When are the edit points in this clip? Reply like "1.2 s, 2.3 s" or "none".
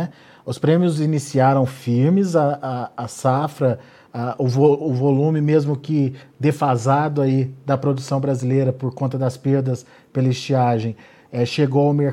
none